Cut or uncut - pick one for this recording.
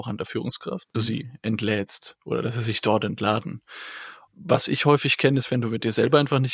cut